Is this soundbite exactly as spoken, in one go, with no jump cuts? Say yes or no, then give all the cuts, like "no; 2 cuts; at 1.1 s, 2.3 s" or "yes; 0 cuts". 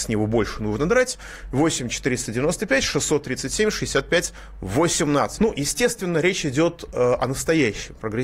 no; 1 cut; at 5.4 s